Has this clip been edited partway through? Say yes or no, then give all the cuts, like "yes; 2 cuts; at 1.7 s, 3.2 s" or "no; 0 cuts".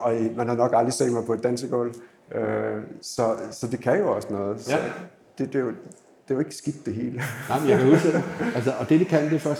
no; 0 cuts